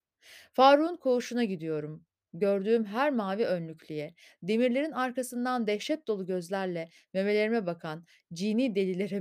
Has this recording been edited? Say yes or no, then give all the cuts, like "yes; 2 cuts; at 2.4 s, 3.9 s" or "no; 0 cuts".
no; 0 cuts